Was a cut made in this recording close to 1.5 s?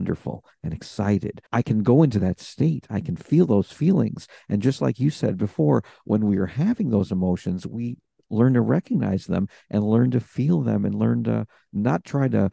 yes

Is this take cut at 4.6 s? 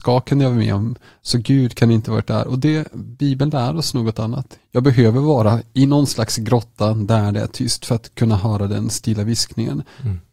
yes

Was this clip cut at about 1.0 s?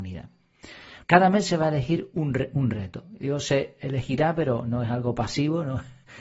yes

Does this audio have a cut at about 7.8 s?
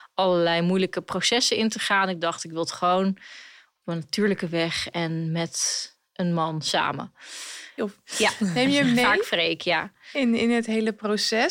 yes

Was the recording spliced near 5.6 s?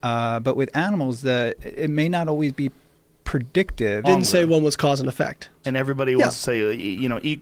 yes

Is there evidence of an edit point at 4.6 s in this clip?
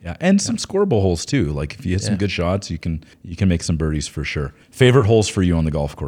yes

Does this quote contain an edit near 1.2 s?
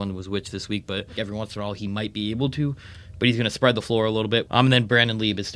yes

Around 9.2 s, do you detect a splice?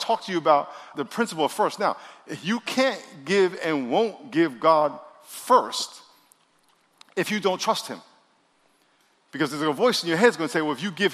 no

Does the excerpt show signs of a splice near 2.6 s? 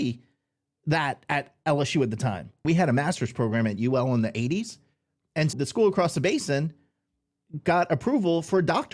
yes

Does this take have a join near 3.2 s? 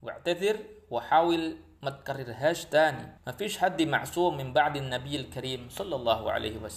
yes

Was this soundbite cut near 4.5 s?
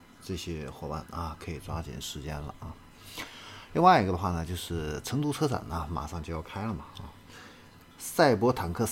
no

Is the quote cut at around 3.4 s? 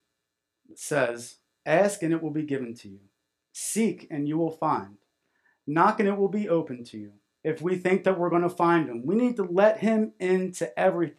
no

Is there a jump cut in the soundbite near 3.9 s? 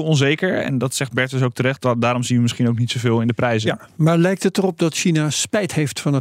no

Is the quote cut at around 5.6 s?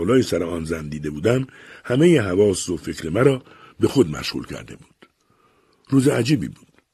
no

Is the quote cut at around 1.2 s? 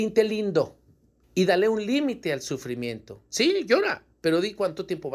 yes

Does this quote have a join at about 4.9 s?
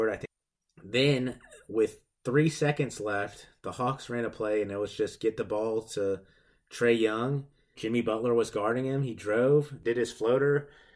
no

